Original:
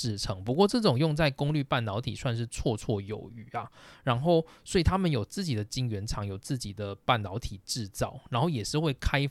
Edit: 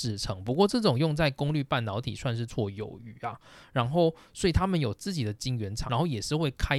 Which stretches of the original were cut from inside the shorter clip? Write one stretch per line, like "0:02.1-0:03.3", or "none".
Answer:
0:02.5-0:02.8
0:06.2-0:08.3